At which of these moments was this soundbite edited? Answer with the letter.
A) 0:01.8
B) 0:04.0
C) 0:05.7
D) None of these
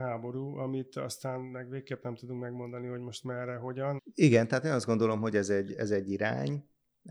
B